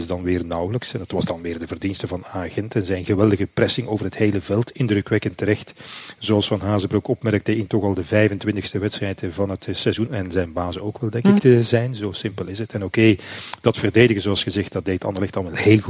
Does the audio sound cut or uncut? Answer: cut